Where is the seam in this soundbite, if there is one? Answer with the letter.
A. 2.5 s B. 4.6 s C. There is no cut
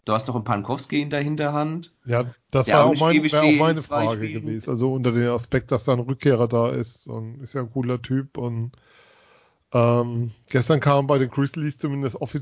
B